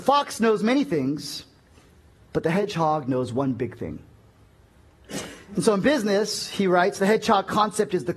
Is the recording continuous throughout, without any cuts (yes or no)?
yes